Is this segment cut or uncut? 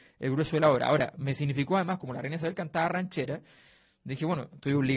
uncut